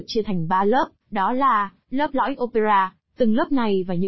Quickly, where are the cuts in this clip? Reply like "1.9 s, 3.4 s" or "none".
1.0 s, 3.0 s